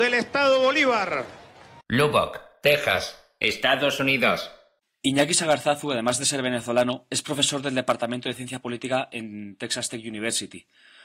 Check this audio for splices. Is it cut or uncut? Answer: cut